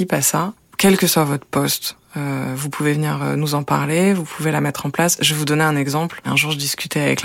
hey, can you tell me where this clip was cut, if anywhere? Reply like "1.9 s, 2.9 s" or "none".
none